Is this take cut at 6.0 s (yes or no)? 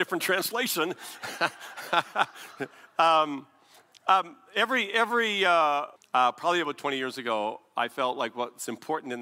yes